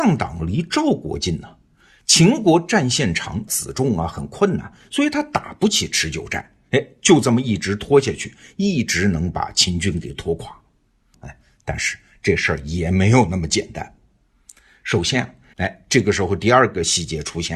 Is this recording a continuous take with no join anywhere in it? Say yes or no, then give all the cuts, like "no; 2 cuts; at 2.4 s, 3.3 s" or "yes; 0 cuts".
no; 3 cuts; at 3.5 s, 11.1 s, 15.5 s